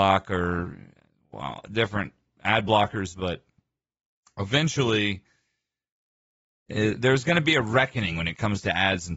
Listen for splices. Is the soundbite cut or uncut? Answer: uncut